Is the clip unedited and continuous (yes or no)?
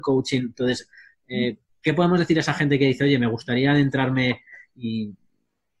yes